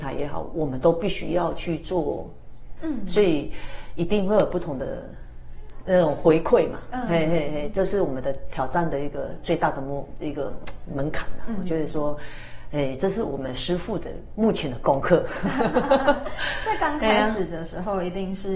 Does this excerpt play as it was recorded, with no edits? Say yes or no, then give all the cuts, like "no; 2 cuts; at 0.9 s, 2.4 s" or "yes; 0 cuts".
no; 1 cut; at 2.8 s